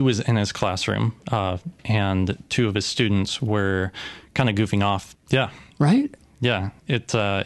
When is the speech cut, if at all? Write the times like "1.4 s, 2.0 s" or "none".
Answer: 1.8 s, 5.1 s